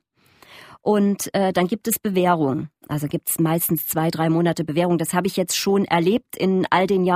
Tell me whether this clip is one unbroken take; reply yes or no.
yes